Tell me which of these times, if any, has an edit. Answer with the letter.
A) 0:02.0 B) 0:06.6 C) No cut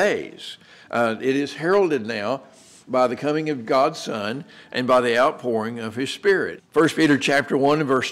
B